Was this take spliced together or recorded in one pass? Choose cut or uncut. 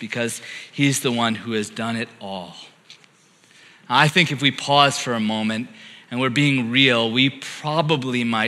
uncut